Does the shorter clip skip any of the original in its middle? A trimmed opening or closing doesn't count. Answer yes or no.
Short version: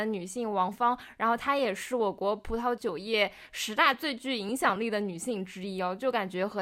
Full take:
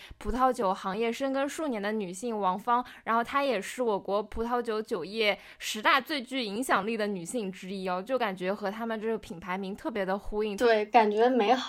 yes